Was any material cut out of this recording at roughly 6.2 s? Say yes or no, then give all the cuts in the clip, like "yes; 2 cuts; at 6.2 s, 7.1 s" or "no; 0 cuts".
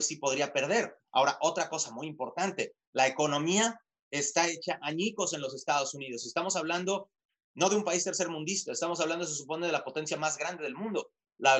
no; 0 cuts